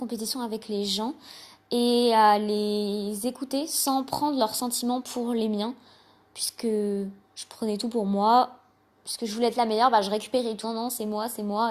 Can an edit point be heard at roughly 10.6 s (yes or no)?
yes